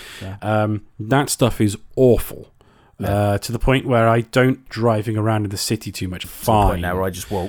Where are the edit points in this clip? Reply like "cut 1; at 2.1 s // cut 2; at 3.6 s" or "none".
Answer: cut 1; at 4.7 s // cut 2; at 6.2 s